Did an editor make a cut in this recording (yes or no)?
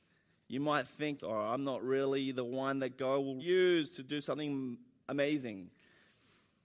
yes